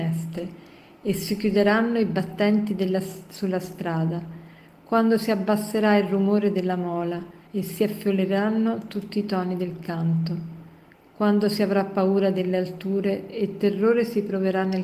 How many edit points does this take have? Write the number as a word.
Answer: one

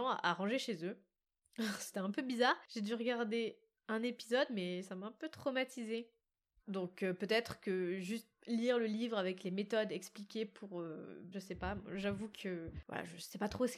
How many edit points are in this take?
two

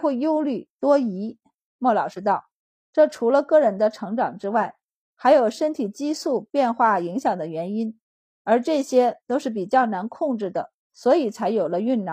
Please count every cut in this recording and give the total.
zero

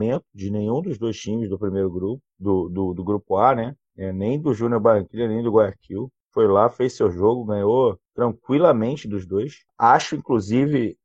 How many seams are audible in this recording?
zero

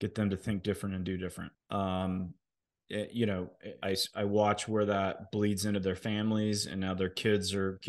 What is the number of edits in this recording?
two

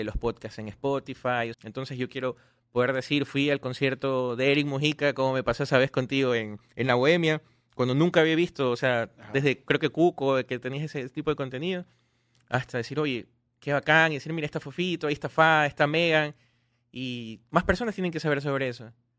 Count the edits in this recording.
one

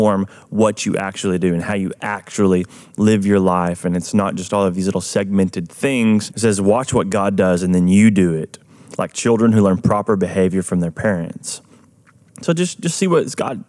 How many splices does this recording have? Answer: one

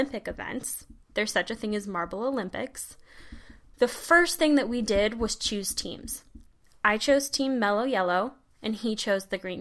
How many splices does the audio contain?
one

